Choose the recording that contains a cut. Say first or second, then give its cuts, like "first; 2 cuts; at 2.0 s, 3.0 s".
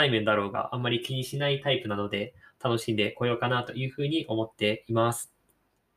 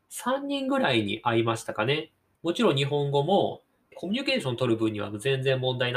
second; 2 cuts; at 2.3 s, 3.9 s